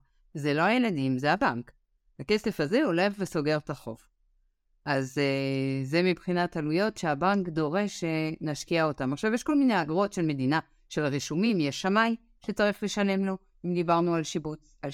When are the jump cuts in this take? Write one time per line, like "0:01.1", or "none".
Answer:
none